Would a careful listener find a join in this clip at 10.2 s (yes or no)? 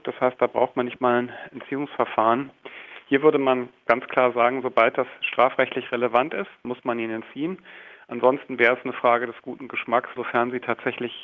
yes